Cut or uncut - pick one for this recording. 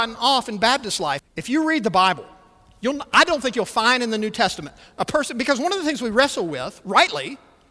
cut